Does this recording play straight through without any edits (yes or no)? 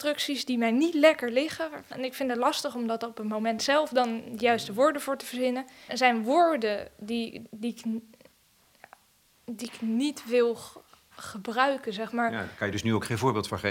no